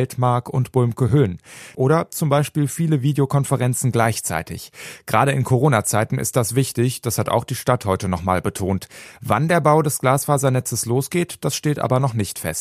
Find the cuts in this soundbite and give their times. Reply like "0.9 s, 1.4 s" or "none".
1.7 s